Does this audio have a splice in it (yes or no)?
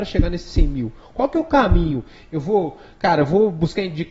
no